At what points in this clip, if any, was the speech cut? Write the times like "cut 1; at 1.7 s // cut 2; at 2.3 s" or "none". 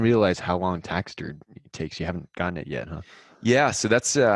none